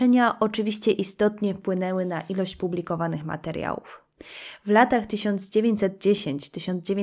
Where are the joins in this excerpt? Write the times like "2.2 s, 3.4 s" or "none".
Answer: none